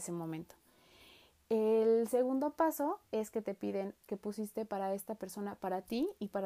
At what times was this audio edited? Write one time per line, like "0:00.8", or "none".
0:04.0